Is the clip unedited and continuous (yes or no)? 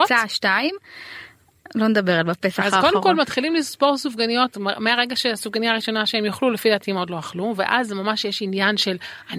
no